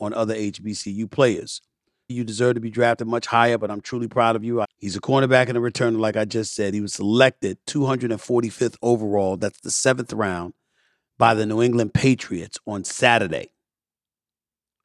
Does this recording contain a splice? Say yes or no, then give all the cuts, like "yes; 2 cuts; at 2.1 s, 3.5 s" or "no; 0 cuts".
yes; 2 cuts; at 2.1 s, 4.6 s